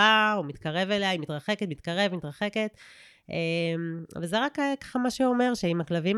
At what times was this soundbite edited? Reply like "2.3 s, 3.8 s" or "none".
none

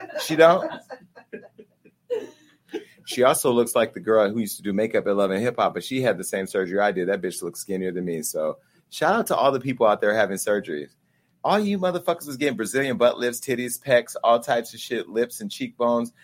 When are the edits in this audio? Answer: none

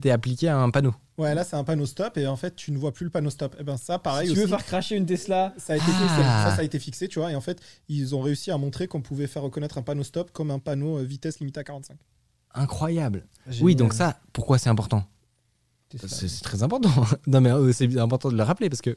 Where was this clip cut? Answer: none

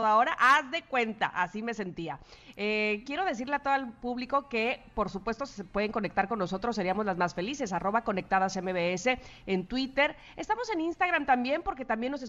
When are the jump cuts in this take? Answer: none

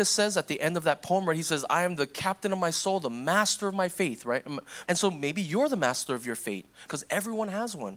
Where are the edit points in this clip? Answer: 4.9 s, 6.9 s

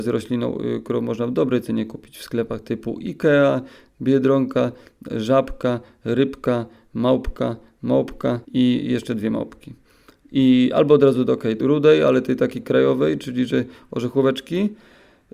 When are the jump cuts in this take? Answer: 8.4 s, 11.6 s

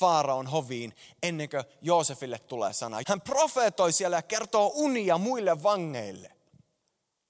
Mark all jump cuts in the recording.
3.0 s

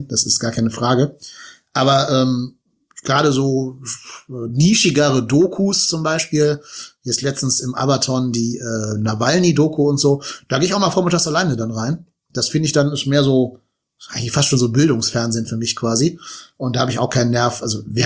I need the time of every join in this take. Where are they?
none

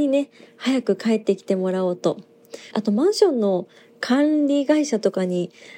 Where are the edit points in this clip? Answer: 2.7 s

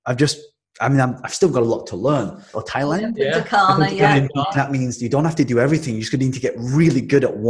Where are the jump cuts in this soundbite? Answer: 2.5 s, 4.5 s

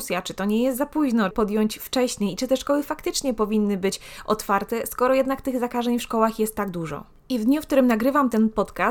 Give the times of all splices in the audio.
1.3 s

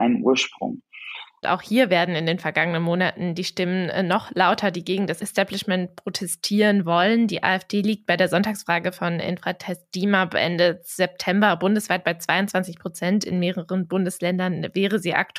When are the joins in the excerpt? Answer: 1.4 s

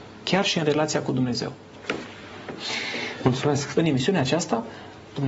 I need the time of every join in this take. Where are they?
3.7 s

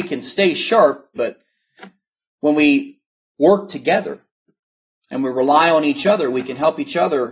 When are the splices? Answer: 1.2 s

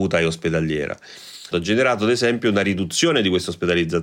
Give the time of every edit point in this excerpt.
1.5 s

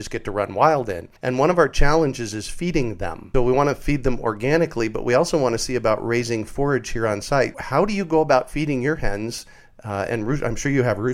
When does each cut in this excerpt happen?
1.2 s, 3.3 s, 7.5 s

